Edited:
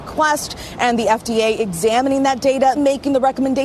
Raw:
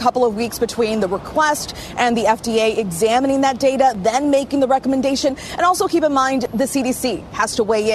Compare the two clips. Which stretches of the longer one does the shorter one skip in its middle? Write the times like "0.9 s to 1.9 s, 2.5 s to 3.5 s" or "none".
3.9 s to 4.2 s